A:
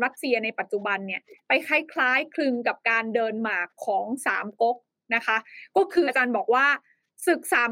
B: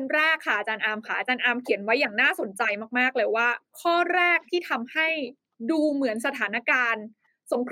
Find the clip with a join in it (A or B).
A